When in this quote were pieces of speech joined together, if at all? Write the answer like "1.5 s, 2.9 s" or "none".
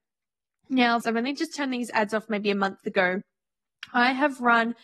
1.0 s